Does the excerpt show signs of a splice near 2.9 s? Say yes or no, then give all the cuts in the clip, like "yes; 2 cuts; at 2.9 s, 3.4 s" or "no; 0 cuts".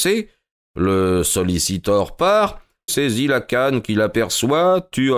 yes; 1 cut; at 2.9 s